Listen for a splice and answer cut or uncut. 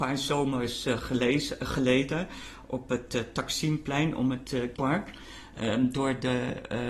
cut